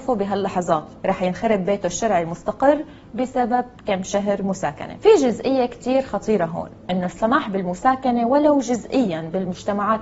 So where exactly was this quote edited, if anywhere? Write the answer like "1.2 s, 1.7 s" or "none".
1.0 s